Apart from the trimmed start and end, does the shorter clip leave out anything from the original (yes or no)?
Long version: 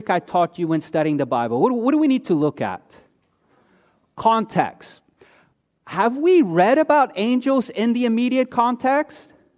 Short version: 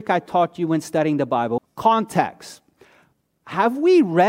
yes